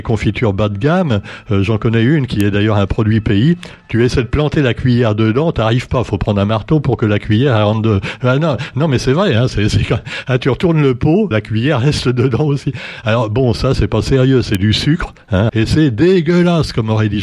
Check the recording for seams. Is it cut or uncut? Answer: cut